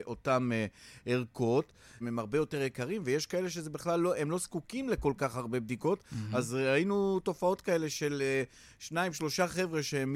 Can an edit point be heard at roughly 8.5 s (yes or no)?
no